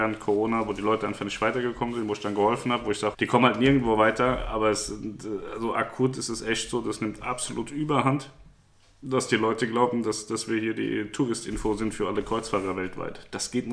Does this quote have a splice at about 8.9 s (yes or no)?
no